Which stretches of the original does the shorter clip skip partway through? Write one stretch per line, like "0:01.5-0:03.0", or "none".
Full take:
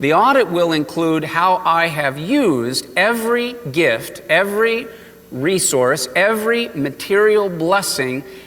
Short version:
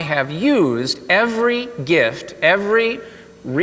none